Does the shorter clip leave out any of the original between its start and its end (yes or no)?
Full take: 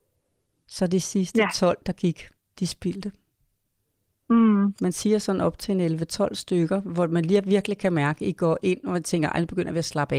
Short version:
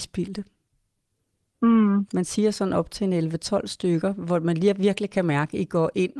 no